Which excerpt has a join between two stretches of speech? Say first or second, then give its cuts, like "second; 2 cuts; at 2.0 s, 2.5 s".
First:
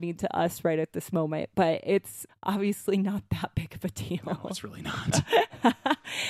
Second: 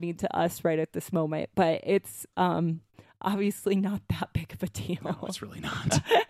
first; 1 cut; at 2.3 s